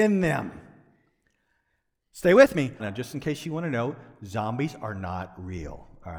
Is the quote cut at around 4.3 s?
no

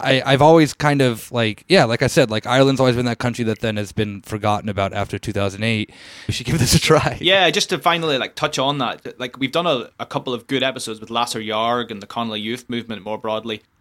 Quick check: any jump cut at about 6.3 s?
yes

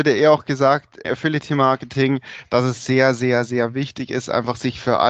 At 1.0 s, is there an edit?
yes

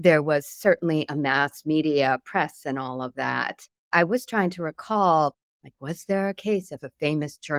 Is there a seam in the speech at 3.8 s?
yes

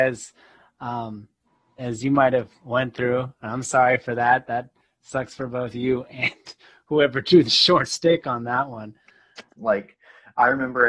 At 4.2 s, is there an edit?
no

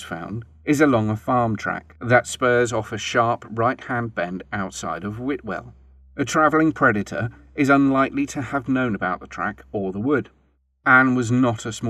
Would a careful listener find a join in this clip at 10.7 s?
no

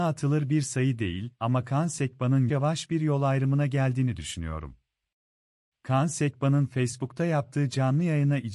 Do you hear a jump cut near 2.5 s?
yes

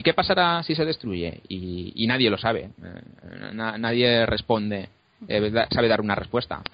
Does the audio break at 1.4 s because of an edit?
no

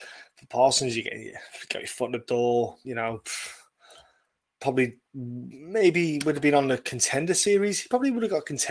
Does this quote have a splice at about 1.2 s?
no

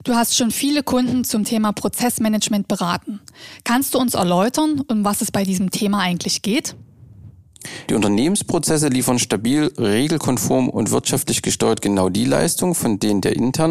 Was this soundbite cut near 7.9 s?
yes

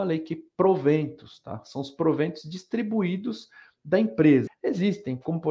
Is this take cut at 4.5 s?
yes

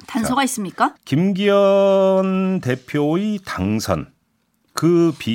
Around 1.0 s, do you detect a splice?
yes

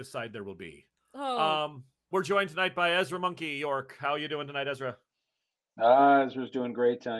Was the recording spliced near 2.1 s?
yes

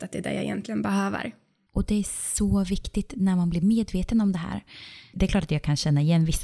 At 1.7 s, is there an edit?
no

